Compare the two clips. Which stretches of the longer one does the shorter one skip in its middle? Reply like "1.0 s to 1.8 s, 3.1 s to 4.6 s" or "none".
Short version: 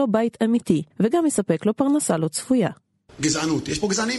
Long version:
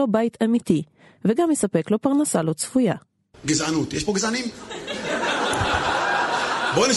0.9 s to 1.2 s